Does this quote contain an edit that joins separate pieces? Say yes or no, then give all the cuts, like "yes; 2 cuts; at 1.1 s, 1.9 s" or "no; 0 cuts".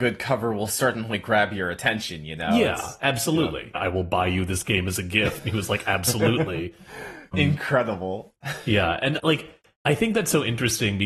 yes; 3 cuts; at 3.7 s, 7.3 s, 9.2 s